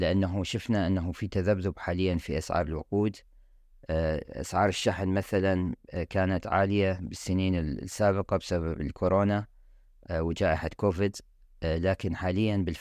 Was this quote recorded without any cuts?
yes; 0 cuts

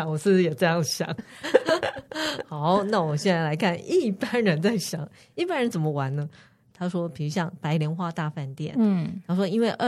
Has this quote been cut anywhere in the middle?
yes; 1 cut; at 6.7 s

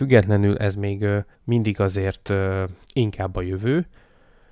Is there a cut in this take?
yes; 2 cuts; at 1.3 s, 2.8 s

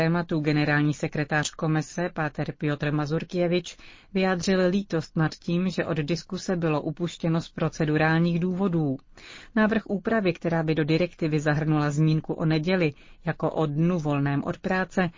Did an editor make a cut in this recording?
no; 0 cuts

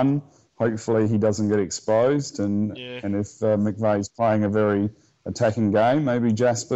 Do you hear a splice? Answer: no; 0 cuts

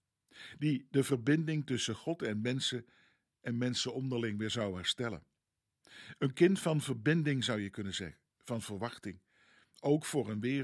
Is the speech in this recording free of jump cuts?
yes; 0 cuts

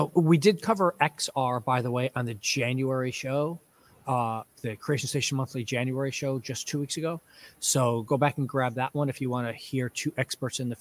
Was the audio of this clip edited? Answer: no; 0 cuts

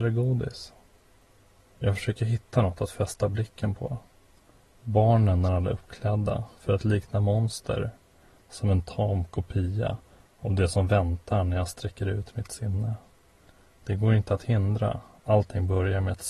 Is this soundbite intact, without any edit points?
yes; 0 cuts

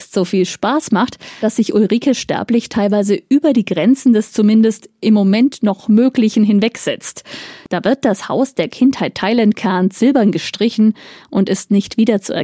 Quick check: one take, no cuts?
no; 1 cut; at 1.4 s

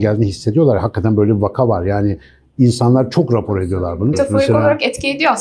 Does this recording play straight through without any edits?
no; 1 cut; at 4.1 s

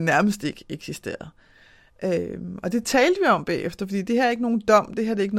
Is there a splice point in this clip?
no; 0 cuts

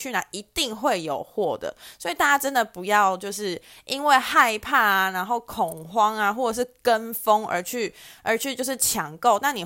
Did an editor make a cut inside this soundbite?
no; 0 cuts

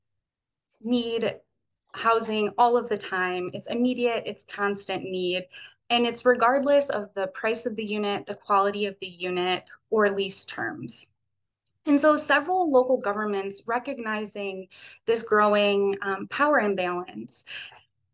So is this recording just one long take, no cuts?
yes; 0 cuts

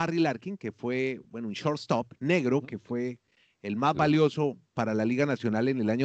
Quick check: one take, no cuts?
yes; 0 cuts

